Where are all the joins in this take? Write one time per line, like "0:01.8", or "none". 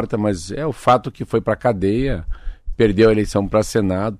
none